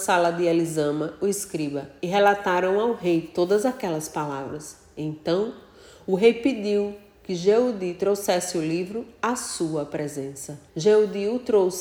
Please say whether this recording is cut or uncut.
cut